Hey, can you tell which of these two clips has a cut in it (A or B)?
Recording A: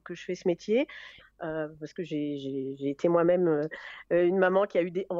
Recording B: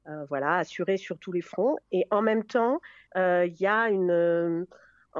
A